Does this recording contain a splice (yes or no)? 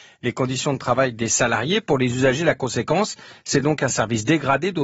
no